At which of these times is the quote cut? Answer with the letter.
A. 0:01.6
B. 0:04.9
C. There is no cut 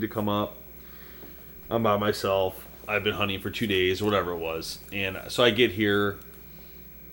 C